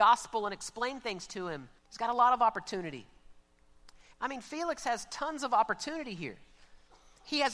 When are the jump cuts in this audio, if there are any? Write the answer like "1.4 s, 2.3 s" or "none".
1.8 s, 4.1 s